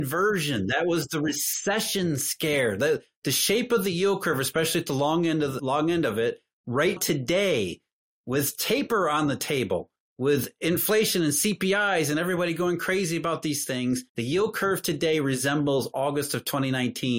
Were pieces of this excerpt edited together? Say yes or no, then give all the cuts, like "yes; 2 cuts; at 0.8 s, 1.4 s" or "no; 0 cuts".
yes; 3 cuts; at 5.6 s, 7.0 s, 14.1 s